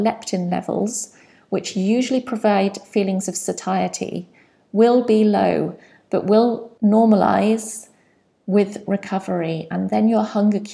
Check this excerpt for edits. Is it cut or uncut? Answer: uncut